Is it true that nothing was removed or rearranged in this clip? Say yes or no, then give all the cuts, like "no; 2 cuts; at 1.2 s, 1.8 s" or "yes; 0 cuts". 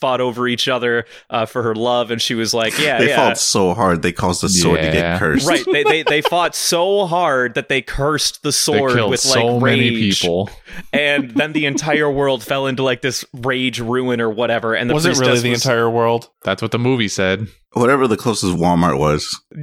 yes; 0 cuts